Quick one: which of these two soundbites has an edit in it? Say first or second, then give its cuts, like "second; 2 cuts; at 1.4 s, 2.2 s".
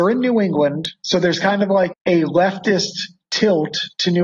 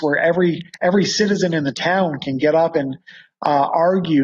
first; 1 cut; at 1.9 s